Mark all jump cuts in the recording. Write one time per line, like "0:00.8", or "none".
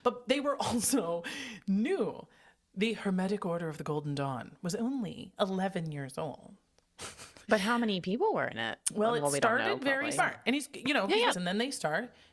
0:10.2
0:11.3